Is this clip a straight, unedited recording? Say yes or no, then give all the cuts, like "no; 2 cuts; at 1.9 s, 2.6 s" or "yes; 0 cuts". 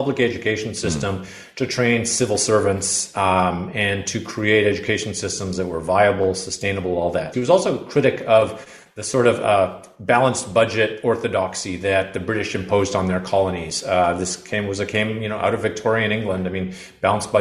no; 1 cut; at 7.3 s